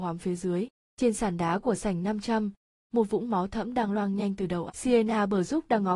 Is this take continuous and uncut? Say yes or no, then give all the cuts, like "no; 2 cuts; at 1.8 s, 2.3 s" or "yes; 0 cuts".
no; 2 cuts; at 2.7 s, 4.7 s